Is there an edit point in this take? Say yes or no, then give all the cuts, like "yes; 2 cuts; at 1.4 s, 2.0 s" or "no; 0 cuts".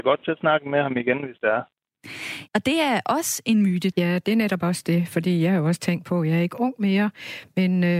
yes; 2 cuts; at 2.5 s, 3.9 s